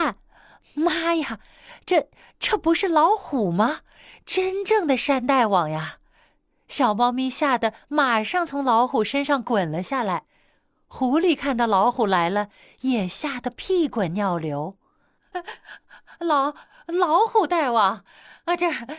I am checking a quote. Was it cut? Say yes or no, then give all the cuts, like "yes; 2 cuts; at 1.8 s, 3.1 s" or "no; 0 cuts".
yes; 1 cut; at 15.3 s